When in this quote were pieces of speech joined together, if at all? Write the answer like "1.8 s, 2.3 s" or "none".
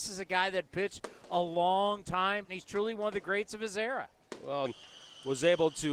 2.4 s, 4.7 s